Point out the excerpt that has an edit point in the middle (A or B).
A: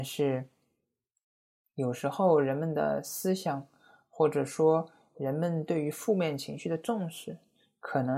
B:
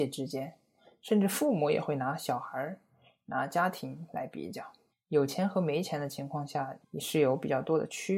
B